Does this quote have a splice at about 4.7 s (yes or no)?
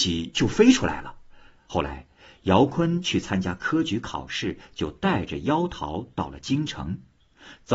no